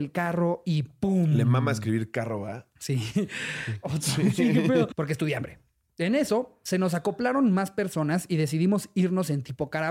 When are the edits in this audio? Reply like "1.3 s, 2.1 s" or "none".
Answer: 3.8 s, 4.9 s